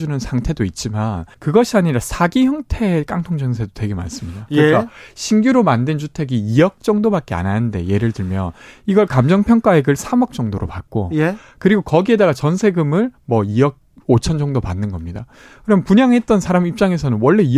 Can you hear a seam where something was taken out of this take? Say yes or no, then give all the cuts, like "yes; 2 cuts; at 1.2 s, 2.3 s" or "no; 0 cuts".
yes; 1 cut; at 1.3 s